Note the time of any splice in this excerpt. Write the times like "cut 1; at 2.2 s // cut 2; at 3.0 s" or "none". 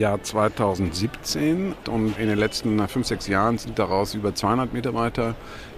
cut 1; at 1.8 s